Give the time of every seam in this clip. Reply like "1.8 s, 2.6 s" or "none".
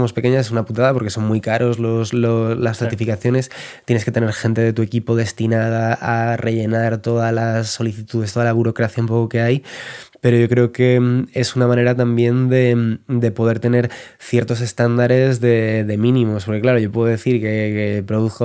none